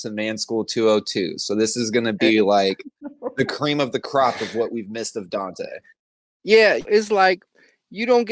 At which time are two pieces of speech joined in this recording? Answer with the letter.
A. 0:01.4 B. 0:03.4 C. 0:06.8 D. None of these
C